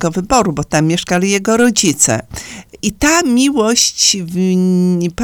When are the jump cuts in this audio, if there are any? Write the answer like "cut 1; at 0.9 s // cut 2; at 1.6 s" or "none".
cut 1; at 2.8 s